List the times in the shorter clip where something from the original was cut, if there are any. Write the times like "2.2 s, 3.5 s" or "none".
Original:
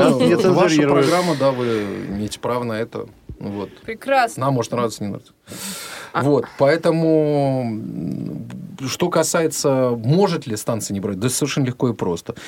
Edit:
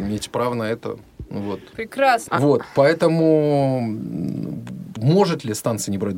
2.3 s, 5.0 s

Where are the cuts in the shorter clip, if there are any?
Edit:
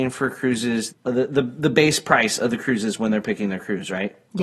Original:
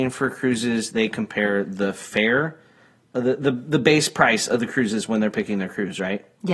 0.9 s

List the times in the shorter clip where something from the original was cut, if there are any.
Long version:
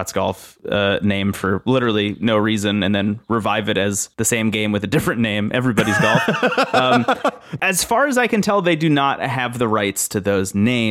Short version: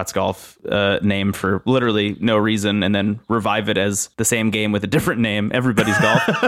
none

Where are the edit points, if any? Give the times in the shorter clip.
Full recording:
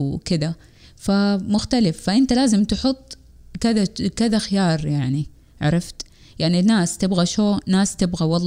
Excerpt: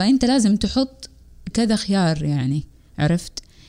1.5 s

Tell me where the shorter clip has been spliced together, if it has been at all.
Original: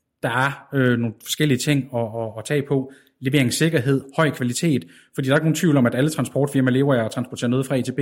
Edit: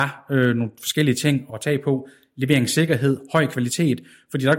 1.5 s

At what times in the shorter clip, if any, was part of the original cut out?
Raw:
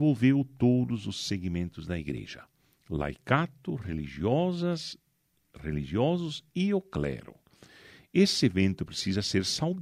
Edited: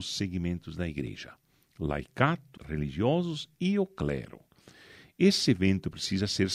2.6 s

